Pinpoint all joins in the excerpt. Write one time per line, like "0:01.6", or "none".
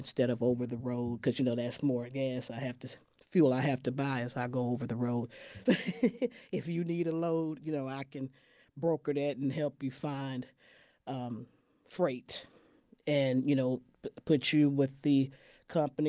0:05.7